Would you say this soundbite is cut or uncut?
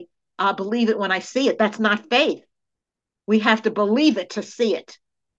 uncut